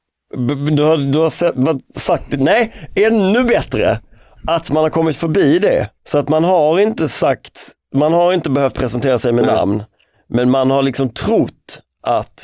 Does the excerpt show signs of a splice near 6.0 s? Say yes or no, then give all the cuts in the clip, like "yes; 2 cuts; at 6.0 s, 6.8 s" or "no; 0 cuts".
yes; 1 cut; at 6.0 s